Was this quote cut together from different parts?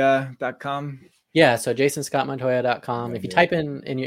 no; 0 cuts

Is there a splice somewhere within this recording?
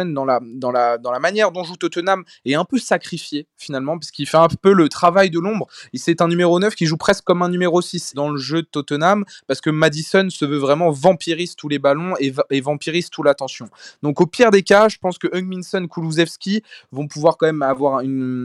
yes; 1 cut; at 8.1 s

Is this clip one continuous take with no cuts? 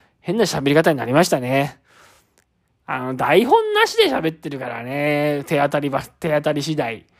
yes; 0 cuts

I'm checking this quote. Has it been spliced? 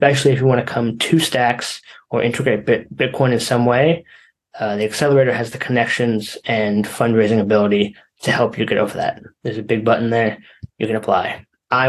yes; 1 cut; at 9.3 s

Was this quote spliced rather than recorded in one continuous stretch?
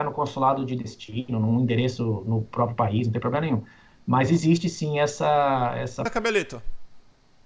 no; 0 cuts

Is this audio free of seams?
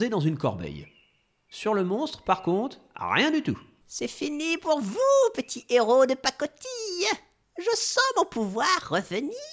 no; 1 cut; at 3.8 s

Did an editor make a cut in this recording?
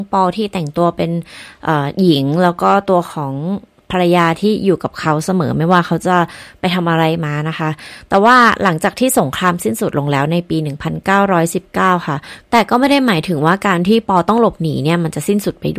yes; 1 cut; at 12.4 s

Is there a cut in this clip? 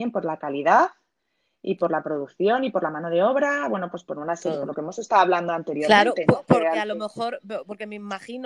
no; 0 cuts

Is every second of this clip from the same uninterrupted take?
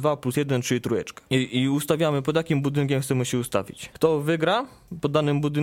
no; 1 cut; at 3.9 s

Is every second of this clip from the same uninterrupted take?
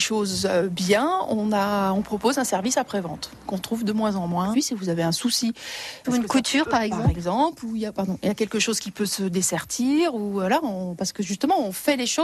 no; 2 cuts; at 4.5 s, 6.0 s

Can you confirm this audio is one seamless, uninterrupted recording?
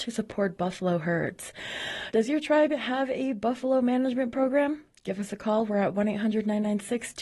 no; 1 cut; at 2.1 s

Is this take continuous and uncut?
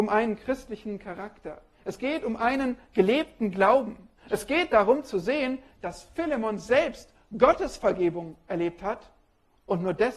yes; 0 cuts

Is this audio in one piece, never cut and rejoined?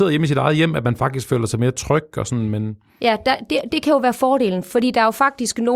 yes; 0 cuts

